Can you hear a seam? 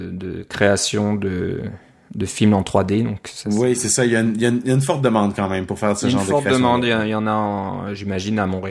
no; 0 cuts

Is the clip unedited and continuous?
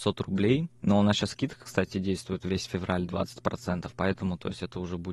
yes; 0 cuts

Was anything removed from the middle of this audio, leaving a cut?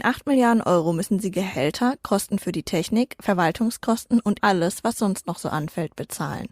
yes; 1 cut; at 4.4 s

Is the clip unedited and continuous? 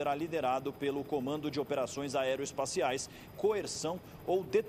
no; 1 cut; at 3.3 s

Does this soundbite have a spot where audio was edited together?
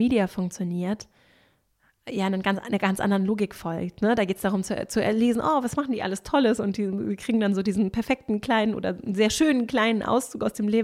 no; 0 cuts

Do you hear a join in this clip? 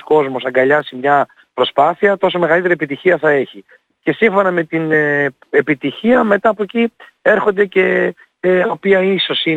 yes; 1 cut; at 8.6 s

